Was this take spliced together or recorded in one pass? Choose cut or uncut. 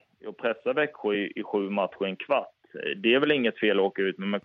uncut